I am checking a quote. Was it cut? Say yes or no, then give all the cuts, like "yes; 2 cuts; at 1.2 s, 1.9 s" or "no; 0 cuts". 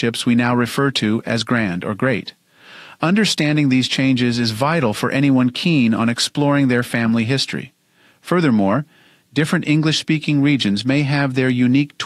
no; 0 cuts